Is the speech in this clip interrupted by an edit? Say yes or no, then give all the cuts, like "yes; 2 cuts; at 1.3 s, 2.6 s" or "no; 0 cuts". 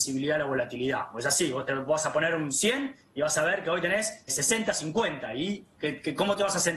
yes; 1 cut; at 4.3 s